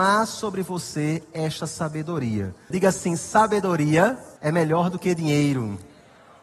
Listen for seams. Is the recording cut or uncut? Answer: cut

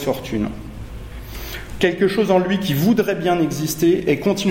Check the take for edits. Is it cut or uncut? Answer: cut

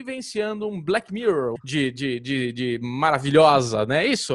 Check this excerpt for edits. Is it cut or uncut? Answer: cut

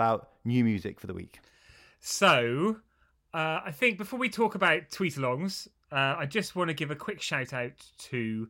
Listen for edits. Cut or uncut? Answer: uncut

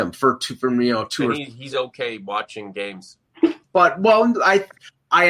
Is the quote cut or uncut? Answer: cut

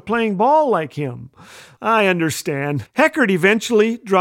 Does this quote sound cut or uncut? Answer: cut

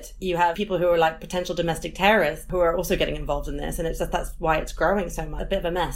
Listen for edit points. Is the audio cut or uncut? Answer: uncut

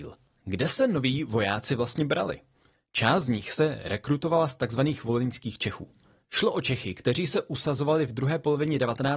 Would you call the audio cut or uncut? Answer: uncut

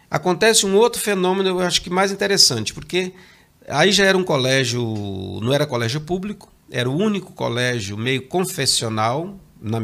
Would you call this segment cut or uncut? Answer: uncut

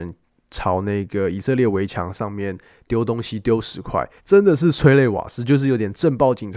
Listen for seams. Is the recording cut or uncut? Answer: cut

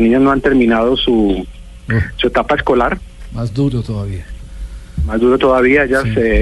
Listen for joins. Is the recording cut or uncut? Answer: uncut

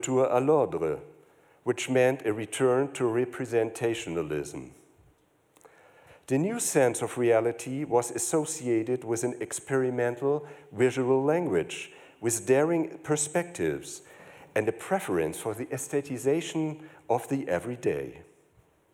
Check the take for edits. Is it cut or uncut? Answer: uncut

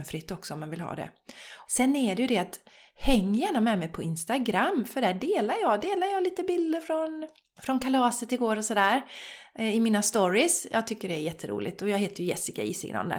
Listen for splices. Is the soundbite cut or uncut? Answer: cut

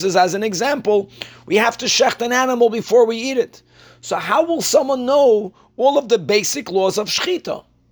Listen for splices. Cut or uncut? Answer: uncut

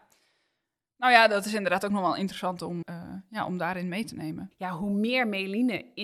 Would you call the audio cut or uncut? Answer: cut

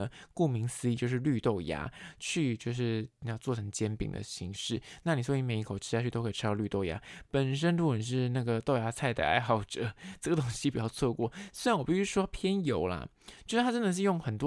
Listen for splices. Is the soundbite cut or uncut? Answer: uncut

